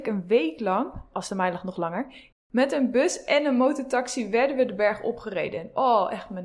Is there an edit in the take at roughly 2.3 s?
yes; 1 cut; at 2.3 s

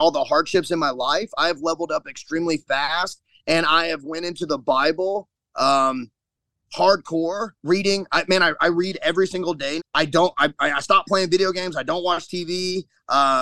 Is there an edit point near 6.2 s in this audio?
no; 2 cuts; at 7.6 s, 9.8 s

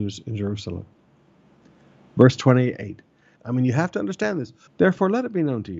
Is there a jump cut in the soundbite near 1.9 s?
no; 2 cuts; at 3.4 s, 4.7 s

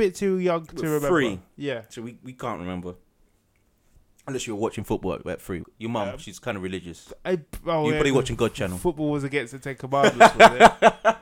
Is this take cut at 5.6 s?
yes; 1 cut; at 5.6 s

